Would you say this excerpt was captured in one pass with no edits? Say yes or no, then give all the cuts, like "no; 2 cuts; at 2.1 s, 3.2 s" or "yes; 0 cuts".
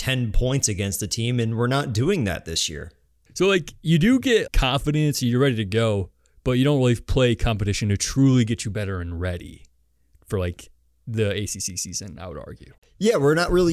no; 3 cuts; at 3.3 s, 4.5 s, 12.8 s